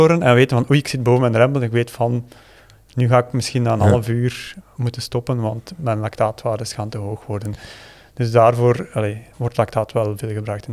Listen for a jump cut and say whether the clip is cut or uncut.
uncut